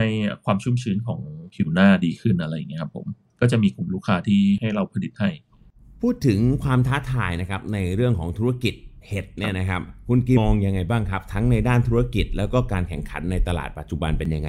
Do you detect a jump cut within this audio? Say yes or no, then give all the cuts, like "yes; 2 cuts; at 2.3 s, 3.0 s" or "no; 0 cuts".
yes; 1 cut; at 10.4 s